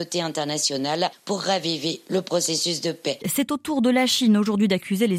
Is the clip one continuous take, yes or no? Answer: no